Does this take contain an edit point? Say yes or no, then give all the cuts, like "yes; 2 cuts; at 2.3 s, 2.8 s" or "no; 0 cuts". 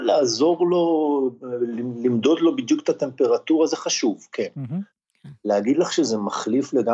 no; 0 cuts